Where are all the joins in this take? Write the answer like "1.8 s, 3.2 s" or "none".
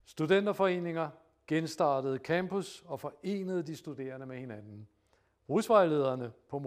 none